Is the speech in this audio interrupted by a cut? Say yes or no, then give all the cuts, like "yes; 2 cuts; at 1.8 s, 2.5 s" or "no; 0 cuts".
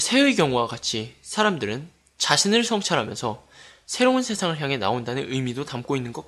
no; 0 cuts